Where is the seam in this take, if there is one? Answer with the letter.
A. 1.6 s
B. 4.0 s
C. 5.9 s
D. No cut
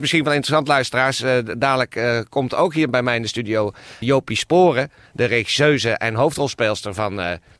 B